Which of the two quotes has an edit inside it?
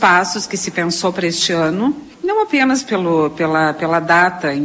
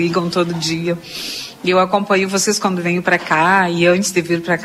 first; 1 cut; at 2.1 s

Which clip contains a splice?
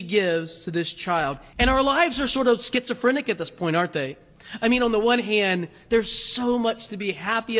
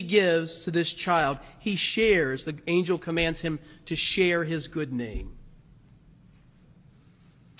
first; 1 cut; at 1.5 s

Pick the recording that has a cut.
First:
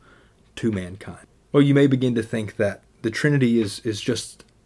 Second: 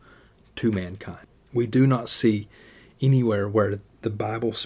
first; 1 cut; at 1.5 s

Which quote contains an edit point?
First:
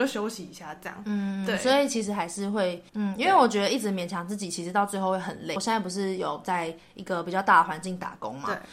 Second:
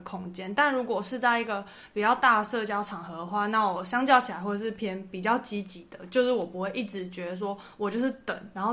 first; 1 cut; at 2.9 s

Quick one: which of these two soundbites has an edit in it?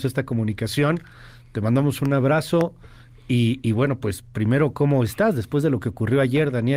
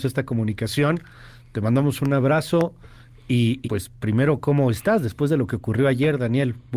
second; 1 cut; at 3.6 s

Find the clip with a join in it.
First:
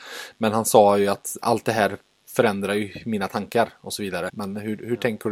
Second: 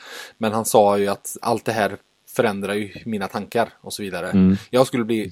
first; 1 cut; at 4.3 s

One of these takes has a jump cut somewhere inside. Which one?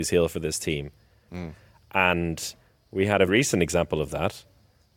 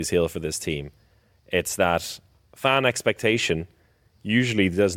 first; 2 cuts; at 1.3 s, 3.3 s

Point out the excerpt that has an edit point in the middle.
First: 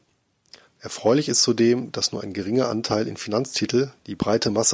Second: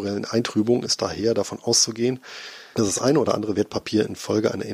second; 1 cut; at 2.7 s

